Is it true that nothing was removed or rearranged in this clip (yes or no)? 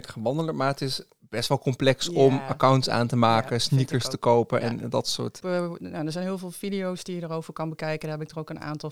no